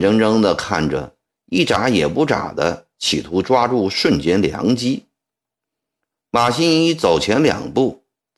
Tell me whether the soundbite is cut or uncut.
cut